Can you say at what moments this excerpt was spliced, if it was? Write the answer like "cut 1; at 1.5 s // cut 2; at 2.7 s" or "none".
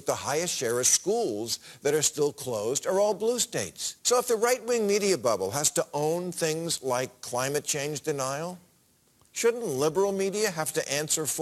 cut 1; at 4.0 s